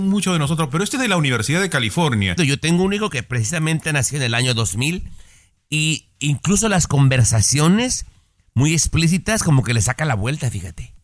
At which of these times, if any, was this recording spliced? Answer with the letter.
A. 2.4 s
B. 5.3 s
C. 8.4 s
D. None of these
A